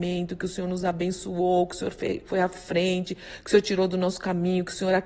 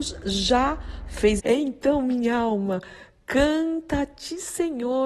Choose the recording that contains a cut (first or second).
second